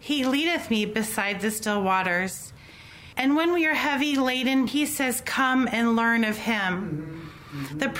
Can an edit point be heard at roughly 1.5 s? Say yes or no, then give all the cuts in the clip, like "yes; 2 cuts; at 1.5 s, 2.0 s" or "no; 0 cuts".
no; 2 cuts; at 3.1 s, 4.7 s